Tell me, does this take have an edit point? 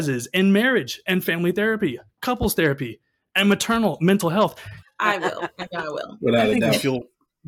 yes; 1 cut; at 4.8 s

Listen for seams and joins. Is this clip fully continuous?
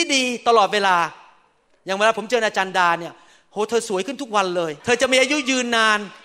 no; 1 cut; at 4.8 s

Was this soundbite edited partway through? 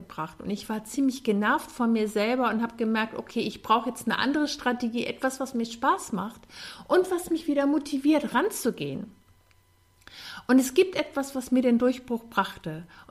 no; 0 cuts

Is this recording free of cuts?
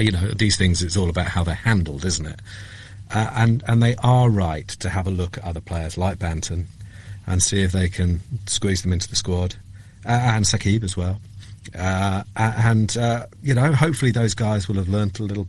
yes; 0 cuts

